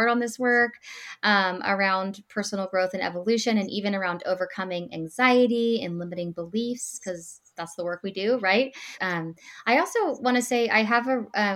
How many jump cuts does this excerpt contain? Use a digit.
1